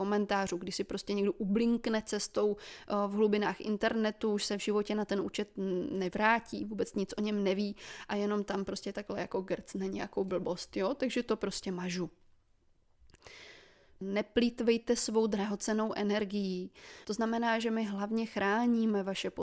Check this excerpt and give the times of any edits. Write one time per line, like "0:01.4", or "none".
0:14.0
0:17.0